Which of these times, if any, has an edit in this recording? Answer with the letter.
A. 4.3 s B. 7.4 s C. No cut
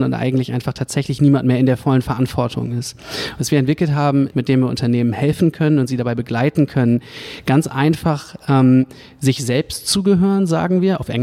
A